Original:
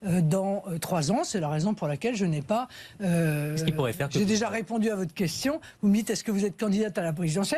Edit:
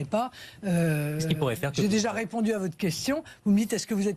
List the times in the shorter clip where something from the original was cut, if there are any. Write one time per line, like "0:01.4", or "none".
none